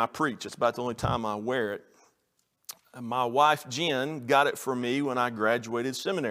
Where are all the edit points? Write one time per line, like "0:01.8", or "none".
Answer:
none